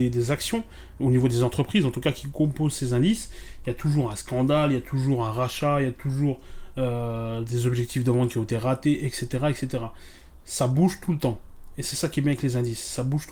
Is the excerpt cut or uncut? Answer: uncut